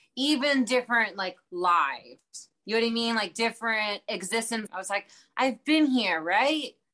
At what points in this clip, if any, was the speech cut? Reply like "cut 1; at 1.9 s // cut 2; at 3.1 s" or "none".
cut 1; at 4.7 s